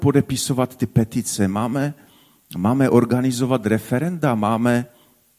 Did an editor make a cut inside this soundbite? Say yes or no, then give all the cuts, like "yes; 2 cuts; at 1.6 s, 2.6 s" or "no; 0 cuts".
no; 0 cuts